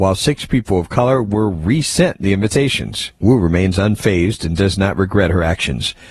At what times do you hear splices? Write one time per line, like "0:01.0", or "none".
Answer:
0:03.2